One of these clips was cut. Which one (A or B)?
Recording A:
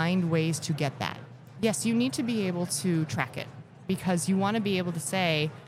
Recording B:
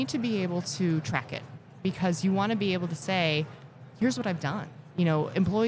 A